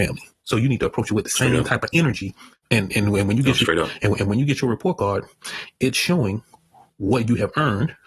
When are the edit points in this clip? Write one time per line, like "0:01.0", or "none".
0:02.6